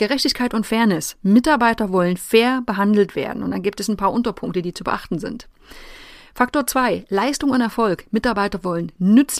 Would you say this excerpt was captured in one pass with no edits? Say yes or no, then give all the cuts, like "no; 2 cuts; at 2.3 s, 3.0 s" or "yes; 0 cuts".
yes; 0 cuts